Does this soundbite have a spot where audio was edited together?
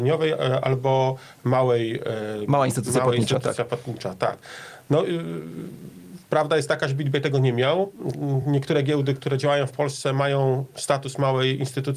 no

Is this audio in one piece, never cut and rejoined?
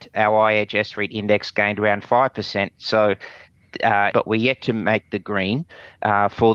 no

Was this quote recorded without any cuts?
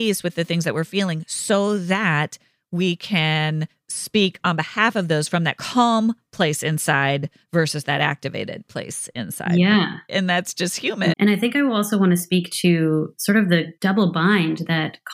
no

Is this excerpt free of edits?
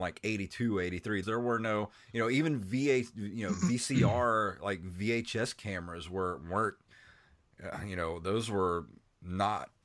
no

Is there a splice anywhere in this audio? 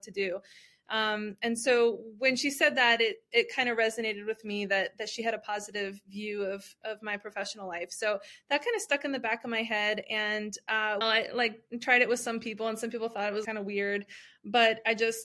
yes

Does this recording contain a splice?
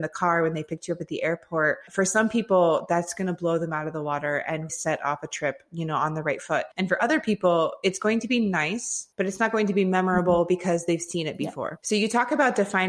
yes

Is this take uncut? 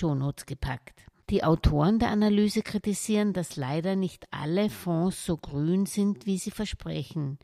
yes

